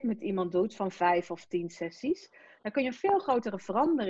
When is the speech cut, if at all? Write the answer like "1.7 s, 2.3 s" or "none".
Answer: none